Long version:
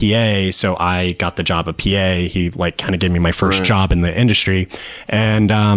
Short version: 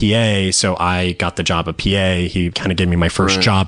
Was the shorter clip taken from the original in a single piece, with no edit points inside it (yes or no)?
no